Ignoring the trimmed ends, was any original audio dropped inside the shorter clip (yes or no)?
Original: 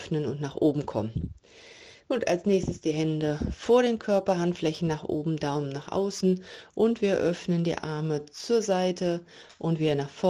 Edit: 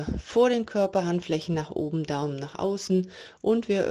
no